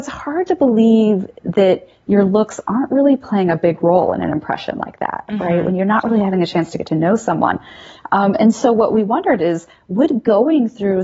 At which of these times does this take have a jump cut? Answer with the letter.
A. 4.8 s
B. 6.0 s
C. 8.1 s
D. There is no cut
D